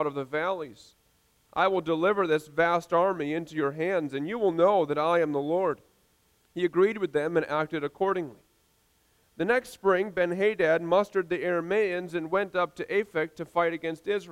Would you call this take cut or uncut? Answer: cut